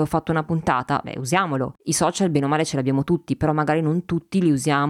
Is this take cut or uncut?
uncut